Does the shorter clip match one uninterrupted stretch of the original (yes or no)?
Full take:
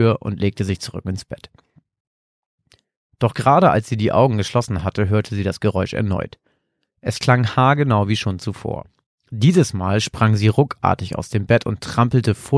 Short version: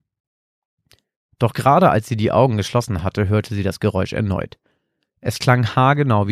yes